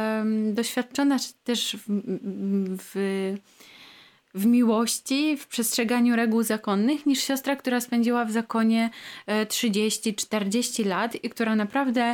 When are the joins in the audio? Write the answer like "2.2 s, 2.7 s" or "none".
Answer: none

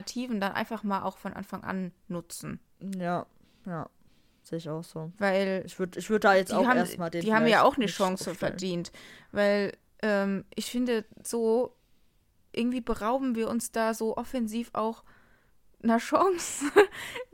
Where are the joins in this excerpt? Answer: none

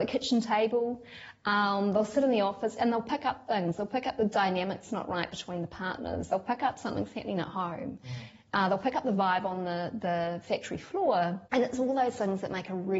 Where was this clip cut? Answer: none

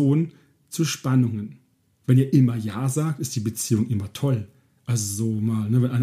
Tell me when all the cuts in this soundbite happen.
none

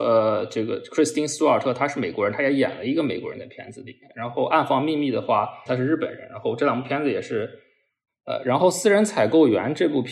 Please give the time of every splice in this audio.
5.7 s, 8.1 s

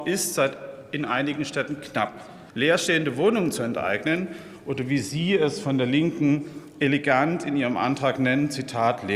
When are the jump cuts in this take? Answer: 2.5 s

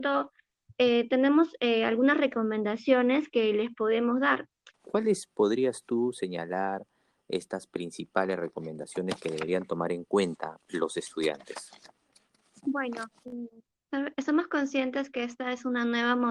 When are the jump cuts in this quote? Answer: 4.7 s

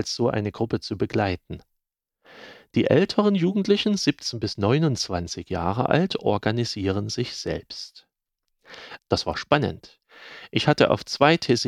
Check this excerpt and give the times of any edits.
9.0 s

